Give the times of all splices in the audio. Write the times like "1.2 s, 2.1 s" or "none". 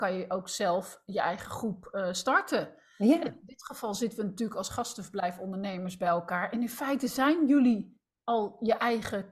none